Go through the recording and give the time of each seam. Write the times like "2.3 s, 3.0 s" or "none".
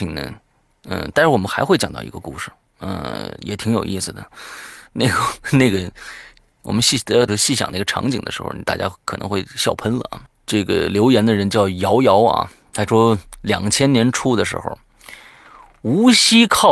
7.3 s, 10.3 s, 12.7 s

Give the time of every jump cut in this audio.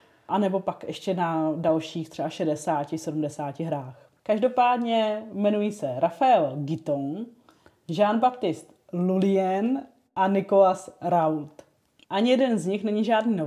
4.2 s

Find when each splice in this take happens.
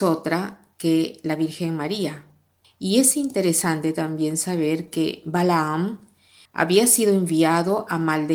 2.6 s, 6.5 s

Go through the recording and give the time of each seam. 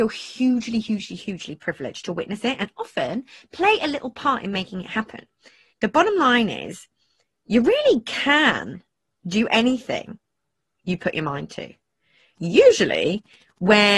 5.7 s, 12.3 s

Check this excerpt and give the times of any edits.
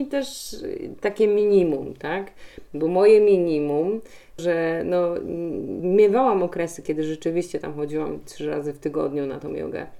4.4 s, 5.8 s

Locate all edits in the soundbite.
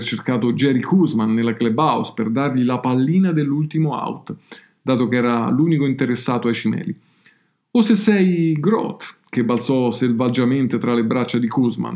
none

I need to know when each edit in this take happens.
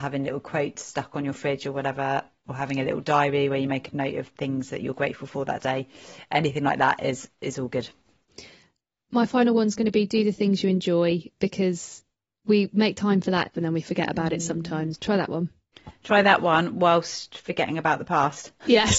13.5 s, 15.0 s

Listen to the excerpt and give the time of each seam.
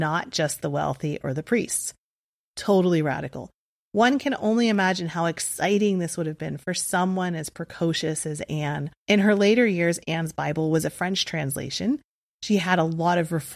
9.0 s

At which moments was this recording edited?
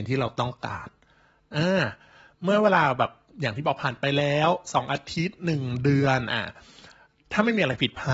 none

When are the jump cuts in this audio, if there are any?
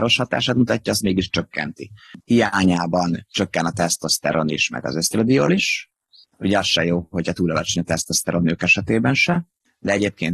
2.2 s

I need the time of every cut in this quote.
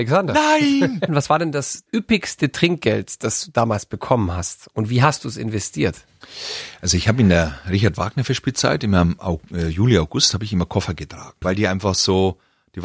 1.1 s, 11.4 s

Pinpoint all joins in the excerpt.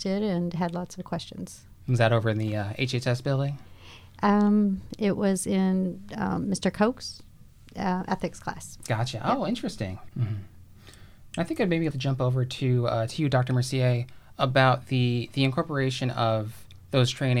10.1 s, 11.9 s

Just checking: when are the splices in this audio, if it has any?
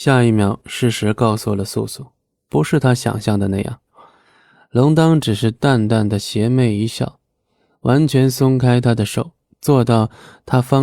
none

